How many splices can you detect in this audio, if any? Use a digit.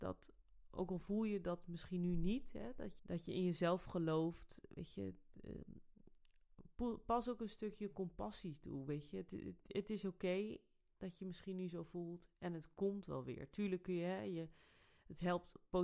1